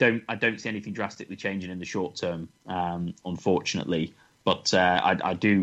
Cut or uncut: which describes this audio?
uncut